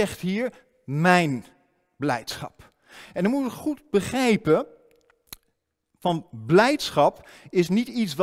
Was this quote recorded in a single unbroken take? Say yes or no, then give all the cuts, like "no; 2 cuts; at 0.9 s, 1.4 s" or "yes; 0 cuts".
yes; 0 cuts